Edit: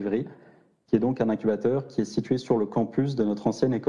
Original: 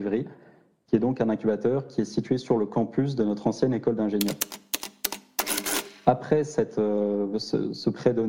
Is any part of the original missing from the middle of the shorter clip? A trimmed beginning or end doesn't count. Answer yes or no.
no